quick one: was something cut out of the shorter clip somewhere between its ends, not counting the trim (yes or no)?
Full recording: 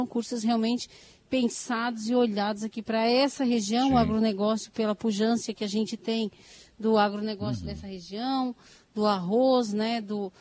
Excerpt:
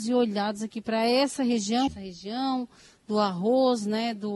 yes